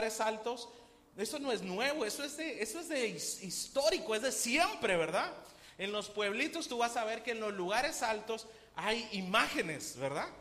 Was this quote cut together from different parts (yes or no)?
no